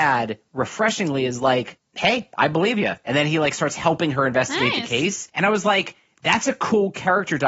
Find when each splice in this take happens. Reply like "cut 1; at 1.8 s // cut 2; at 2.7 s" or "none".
none